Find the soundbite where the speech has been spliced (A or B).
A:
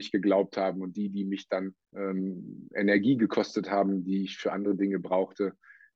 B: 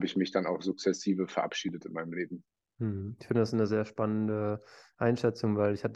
A